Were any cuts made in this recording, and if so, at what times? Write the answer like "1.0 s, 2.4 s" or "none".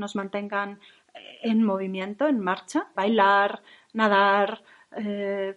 2.9 s